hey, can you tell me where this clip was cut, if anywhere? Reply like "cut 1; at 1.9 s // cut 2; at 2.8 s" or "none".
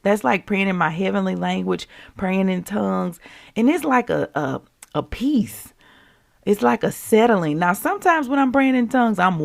none